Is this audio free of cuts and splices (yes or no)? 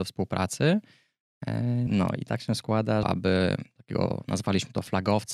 no